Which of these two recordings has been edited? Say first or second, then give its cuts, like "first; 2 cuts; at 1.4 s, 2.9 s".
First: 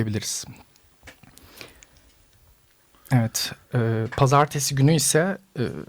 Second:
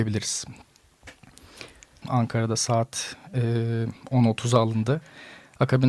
second; 1 cut; at 2.0 s